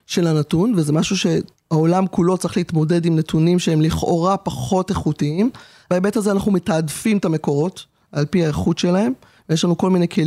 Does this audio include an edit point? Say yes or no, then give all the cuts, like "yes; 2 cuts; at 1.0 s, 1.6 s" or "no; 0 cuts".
no; 0 cuts